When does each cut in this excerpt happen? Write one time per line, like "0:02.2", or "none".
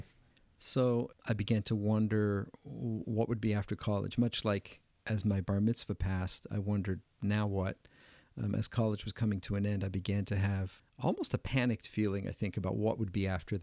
0:01.1